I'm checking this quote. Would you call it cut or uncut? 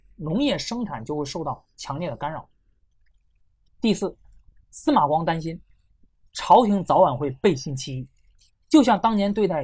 uncut